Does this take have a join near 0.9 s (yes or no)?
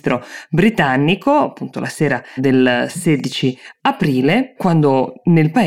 no